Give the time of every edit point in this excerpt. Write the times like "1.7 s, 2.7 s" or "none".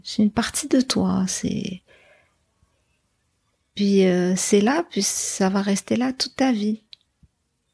none